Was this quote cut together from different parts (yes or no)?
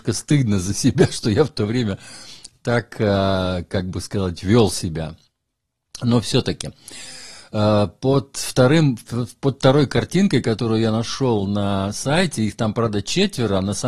no